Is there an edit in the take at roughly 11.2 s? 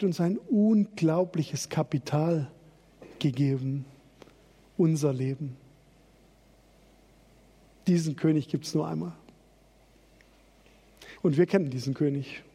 yes; 1 cut; at 11.2 s

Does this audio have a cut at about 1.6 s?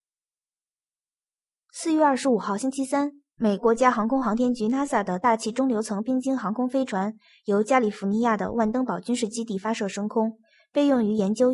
no; 1 cut; at 3.6 s

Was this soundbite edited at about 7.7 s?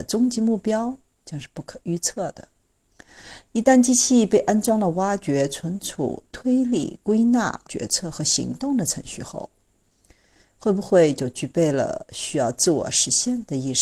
yes; 1 cut; at 7.7 s

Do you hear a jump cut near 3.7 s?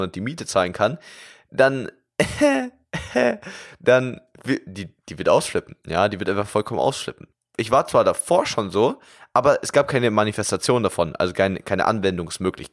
no; 0 cuts

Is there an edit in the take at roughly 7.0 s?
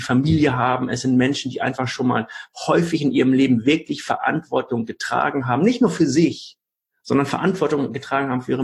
no; 0 cuts

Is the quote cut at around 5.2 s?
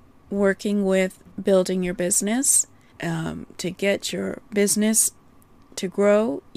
no; 1 cut; at 2.9 s

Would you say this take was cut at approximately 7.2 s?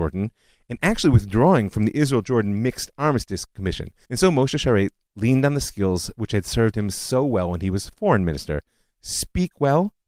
no; 1 cut; at 4.0 s

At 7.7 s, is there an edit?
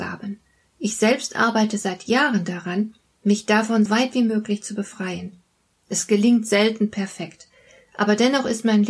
no; 1 cut; at 3.9 s

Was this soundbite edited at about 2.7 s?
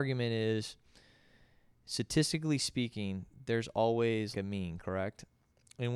no; 1 cut; at 4.3 s

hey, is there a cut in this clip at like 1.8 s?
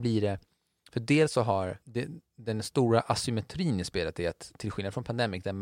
yes; 1 cut; at 1.8 s

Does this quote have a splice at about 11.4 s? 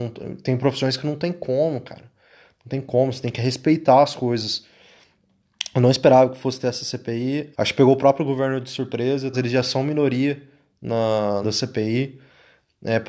yes; 3 cuts; at 7.5 s, 9.3 s, 11.4 s

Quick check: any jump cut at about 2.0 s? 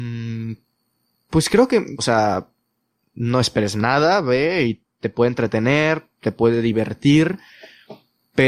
yes; 1 cut; at 2.0 s

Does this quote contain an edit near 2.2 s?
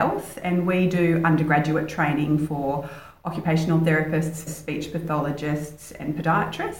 no; 1 cut; at 4.5 s

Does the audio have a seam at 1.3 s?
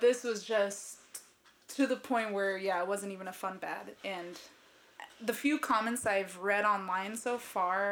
no; 0 cuts

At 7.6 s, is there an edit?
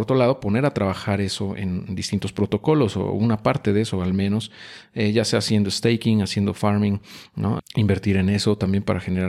yes; 1 cut; at 7.6 s

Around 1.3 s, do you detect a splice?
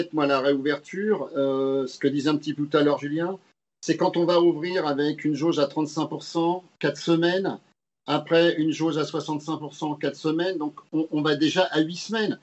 no; 0 cuts

